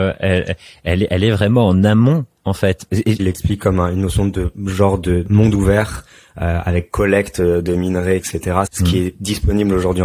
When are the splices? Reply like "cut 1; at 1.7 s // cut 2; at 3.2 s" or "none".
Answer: cut 1; at 3.2 s // cut 2; at 8.7 s